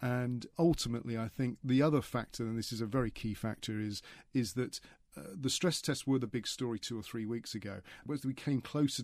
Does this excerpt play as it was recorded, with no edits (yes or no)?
yes